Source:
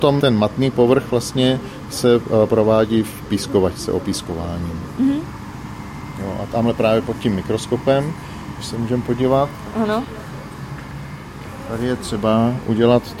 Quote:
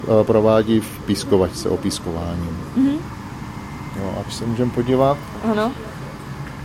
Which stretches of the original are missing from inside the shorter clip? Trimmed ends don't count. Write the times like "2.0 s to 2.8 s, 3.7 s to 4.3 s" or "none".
6.5 s to 8.5 s

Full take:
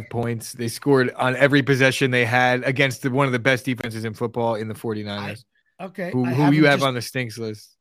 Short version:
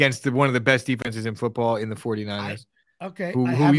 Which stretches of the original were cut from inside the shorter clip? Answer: none

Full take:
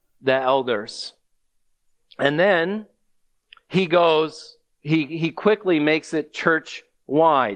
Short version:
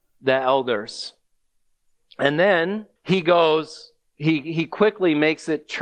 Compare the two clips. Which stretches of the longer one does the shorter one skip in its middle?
3.0 s to 3.6 s

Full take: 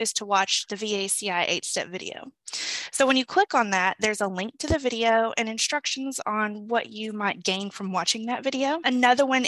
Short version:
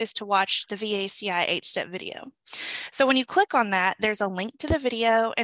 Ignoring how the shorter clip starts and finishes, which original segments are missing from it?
none

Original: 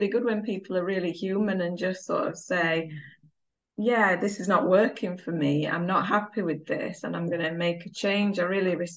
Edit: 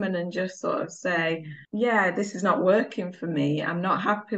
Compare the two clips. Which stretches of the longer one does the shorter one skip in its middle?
3.1 s to 3.7 s

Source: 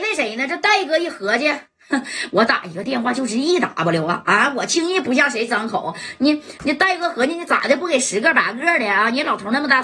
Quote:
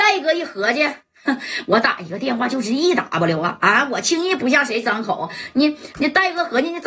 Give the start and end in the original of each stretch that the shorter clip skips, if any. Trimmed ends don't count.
none

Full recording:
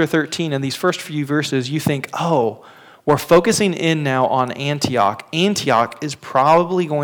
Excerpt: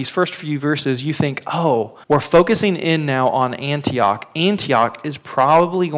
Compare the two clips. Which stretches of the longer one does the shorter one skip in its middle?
2.7 s to 3.0 s

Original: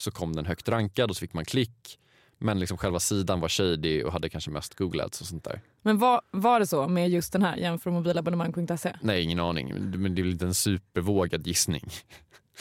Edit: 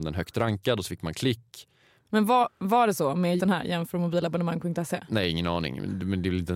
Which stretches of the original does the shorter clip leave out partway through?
2.3 s to 5.7 s, 7.1 s to 7.3 s

